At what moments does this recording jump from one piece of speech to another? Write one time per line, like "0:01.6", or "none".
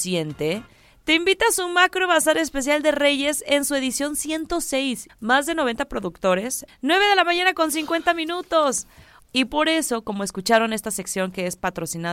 0:05.1
0:06.7
0:09.2